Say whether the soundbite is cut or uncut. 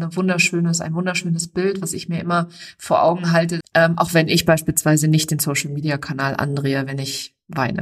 cut